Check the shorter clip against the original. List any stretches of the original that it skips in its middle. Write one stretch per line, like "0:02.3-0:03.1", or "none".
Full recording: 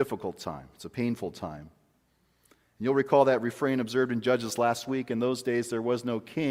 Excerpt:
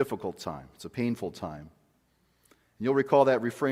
none